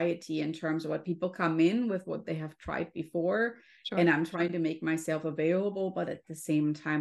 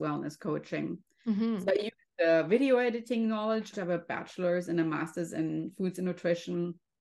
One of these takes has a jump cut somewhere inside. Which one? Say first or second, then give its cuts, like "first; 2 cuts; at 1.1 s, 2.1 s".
second; 1 cut; at 3.7 s